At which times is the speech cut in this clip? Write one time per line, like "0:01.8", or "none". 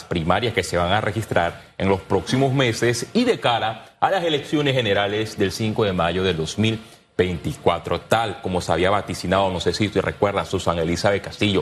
none